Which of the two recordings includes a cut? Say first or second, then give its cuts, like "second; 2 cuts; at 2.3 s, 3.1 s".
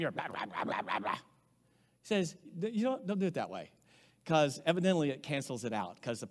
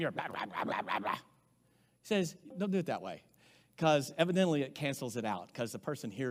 second; 1 cut; at 2.5 s